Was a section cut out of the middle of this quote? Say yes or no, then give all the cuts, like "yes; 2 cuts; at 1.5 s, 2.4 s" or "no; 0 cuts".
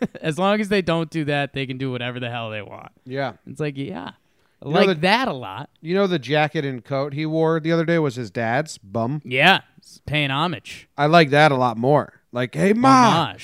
no; 0 cuts